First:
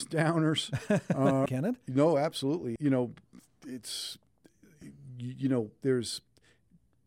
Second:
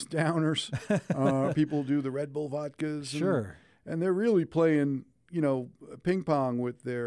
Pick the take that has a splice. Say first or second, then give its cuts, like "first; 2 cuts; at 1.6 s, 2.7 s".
first; 2 cuts; at 1.5 s, 2.8 s